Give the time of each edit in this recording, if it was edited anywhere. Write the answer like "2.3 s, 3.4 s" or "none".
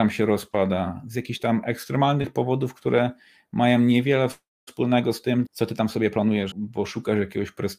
5.5 s, 6.5 s